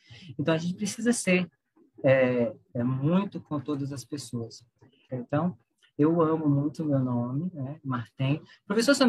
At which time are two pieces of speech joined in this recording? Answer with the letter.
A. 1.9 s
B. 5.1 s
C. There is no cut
B